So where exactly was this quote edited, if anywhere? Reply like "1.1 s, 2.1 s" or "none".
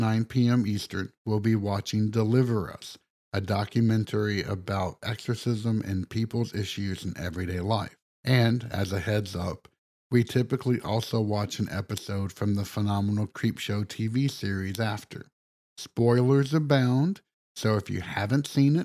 8.1 s, 15.6 s